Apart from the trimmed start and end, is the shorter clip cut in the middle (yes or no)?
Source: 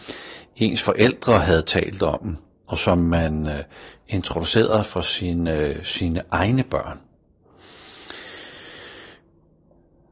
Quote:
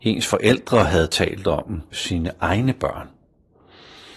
yes